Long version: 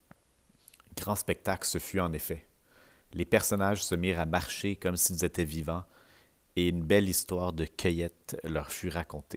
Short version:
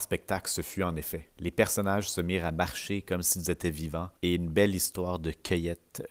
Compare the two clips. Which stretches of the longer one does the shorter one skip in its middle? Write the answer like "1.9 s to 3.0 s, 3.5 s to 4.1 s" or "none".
2.5 s to 3.1 s, 5.9 s to 6.5 s